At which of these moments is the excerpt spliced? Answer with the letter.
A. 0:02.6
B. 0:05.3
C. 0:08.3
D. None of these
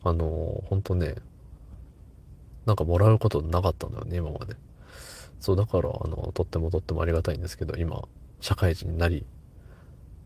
D